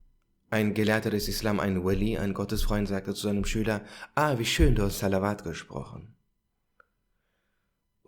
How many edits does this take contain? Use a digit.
0